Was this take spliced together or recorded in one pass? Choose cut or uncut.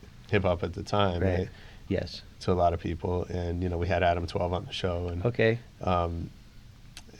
cut